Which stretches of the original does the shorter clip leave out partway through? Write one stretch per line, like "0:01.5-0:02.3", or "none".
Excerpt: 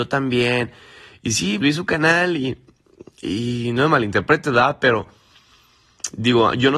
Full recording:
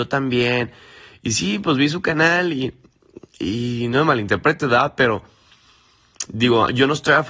0:01.6-0:01.8